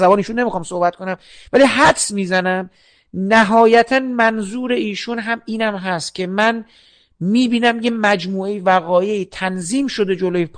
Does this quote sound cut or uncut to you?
uncut